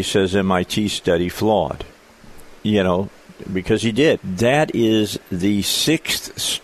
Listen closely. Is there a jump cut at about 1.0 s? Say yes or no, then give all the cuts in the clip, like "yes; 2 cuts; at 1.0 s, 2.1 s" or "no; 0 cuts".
no; 2 cuts; at 2.6 s, 4.2 s